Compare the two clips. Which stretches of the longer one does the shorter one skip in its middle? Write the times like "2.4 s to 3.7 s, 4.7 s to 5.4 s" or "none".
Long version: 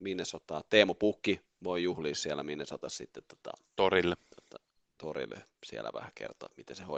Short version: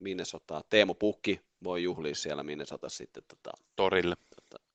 none